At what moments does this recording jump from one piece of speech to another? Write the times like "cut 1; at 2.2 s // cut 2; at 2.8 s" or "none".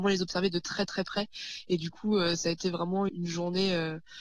cut 1; at 3.1 s